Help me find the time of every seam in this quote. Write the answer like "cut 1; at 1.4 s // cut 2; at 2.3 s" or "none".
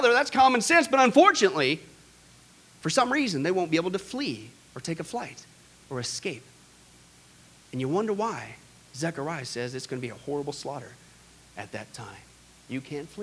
none